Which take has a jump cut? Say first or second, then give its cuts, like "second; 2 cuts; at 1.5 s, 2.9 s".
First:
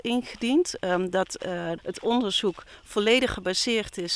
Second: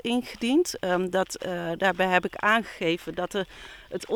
first; 1 cut; at 1.8 s